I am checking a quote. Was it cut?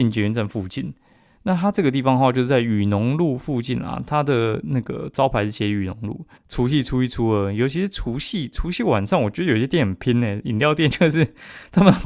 yes; 1 cut; at 6.4 s

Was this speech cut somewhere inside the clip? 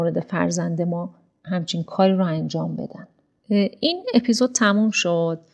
no; 0 cuts

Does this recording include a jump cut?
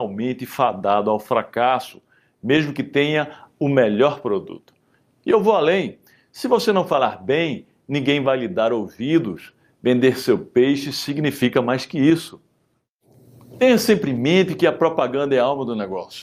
yes; 1 cut; at 5.2 s

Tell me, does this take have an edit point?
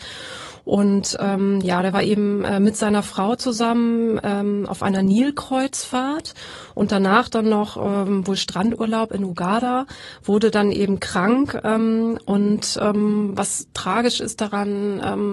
no; 0 cuts

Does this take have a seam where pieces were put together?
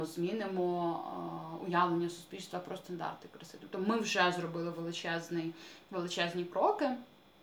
no; 0 cuts

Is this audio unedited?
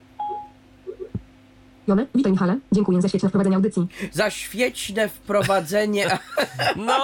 yes; 0 cuts

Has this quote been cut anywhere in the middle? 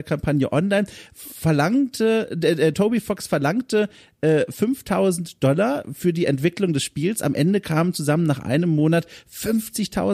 no; 0 cuts

